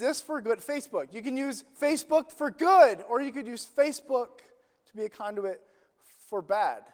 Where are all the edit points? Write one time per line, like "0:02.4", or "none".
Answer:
none